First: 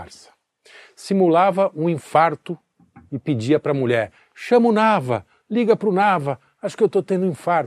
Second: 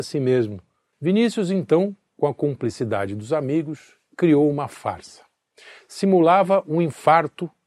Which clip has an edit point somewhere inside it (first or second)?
second